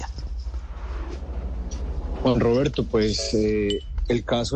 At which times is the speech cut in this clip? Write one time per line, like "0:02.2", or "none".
none